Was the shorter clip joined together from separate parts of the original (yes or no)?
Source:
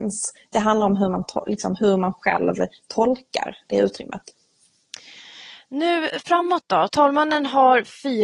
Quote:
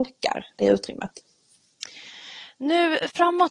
no